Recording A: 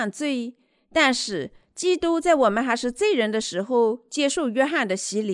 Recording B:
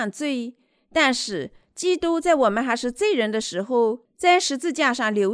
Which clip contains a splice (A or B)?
B